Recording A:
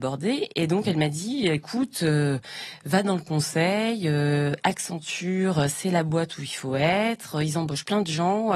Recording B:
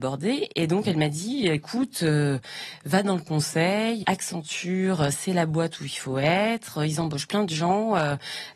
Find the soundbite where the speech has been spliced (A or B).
B